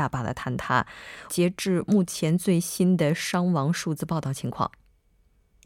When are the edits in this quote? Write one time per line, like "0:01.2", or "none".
0:01.3